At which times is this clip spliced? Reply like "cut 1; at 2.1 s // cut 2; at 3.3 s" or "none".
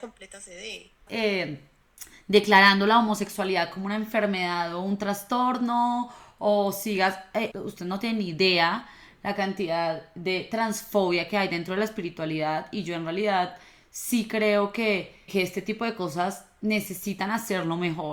cut 1; at 1.1 s // cut 2; at 7.5 s // cut 3; at 15.3 s